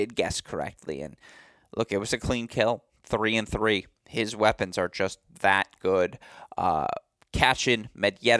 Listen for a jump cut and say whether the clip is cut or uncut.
uncut